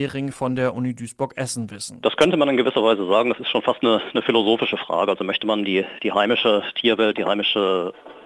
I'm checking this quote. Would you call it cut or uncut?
uncut